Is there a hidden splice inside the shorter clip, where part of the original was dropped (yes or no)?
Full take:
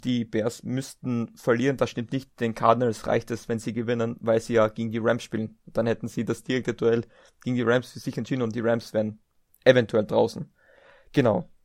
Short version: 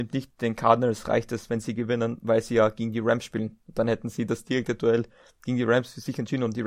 no